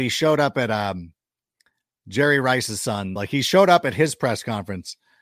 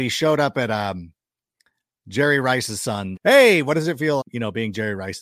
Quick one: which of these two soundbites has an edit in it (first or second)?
second